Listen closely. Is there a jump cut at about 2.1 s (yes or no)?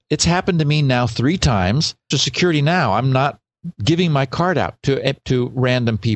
yes